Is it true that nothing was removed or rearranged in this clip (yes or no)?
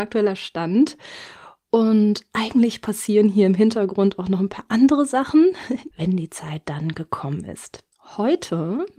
no